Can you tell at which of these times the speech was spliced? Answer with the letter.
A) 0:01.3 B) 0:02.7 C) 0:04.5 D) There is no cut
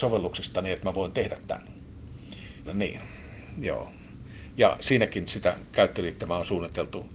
B